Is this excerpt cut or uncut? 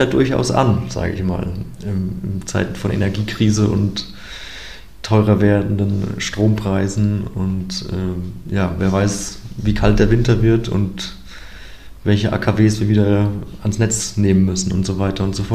uncut